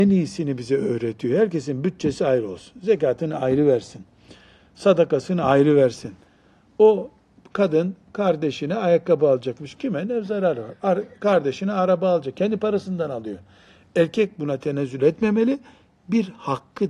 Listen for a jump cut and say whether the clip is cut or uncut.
uncut